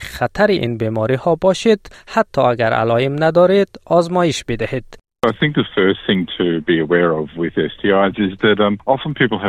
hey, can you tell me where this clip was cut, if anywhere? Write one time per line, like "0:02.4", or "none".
none